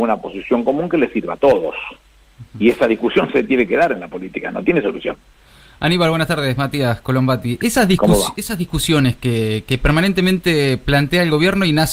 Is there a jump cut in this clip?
no; 0 cuts

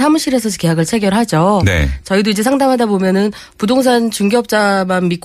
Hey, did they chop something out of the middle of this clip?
no; 0 cuts

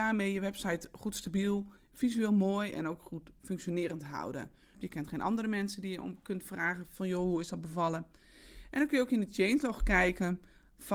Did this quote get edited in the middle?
yes; 1 cut; at 4.7 s

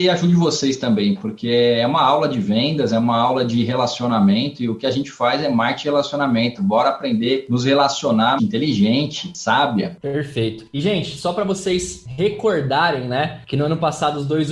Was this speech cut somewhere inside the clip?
yes; 1 cut; at 8.4 s

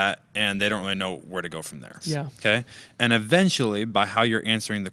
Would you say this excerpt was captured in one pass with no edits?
no; 1 cut; at 2.0 s

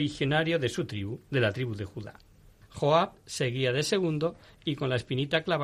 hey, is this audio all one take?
no; 1 cut; at 2.6 s

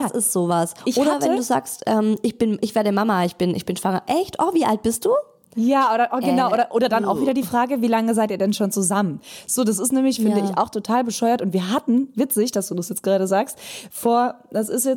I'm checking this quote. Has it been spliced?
no; 0 cuts

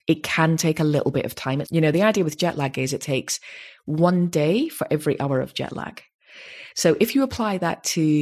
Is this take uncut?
no; 1 cut; at 1.6 s

